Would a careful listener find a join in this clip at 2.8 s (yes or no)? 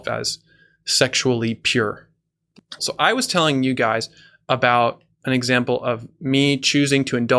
yes